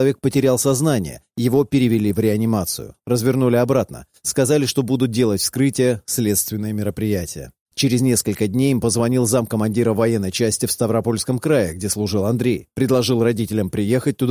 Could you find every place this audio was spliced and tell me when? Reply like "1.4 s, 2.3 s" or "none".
3.0 s, 7.7 s